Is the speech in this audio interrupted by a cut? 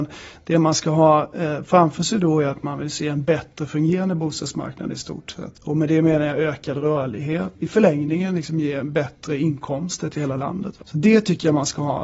yes; 3 cuts; at 5.5 s, 7.6 s, 10.8 s

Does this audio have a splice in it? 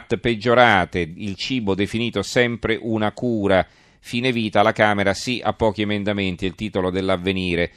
no; 0 cuts

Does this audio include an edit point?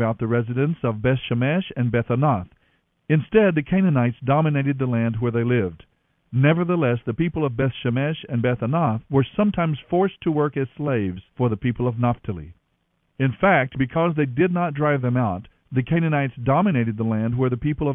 yes; 1 cut; at 13.1 s

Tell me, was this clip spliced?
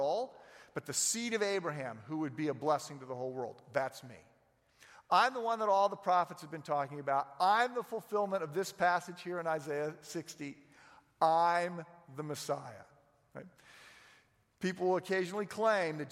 no; 0 cuts

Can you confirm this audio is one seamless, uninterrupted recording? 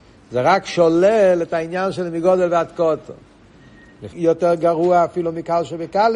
no; 1 cut; at 4.1 s

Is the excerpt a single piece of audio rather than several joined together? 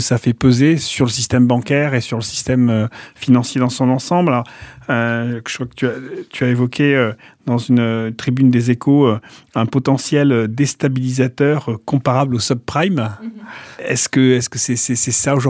yes; 0 cuts

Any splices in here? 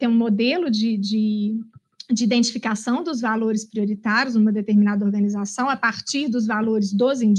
no; 0 cuts

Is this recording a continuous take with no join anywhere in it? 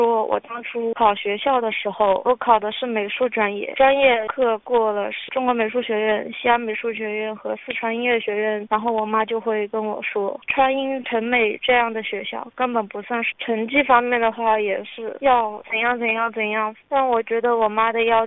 no; 1 cut; at 13.3 s

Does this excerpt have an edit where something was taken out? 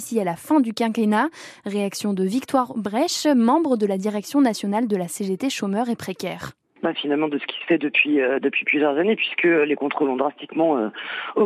yes; 1 cut; at 6.9 s

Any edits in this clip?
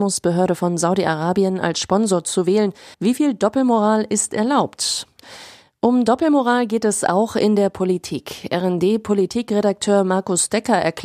yes; 1 cut; at 2.9 s

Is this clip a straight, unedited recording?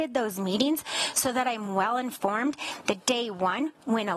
yes; 0 cuts

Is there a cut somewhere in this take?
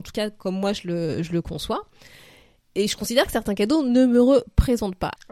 no; 0 cuts

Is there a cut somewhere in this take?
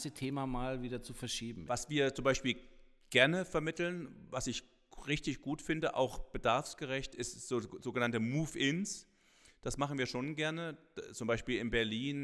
yes; 1 cut; at 1.7 s

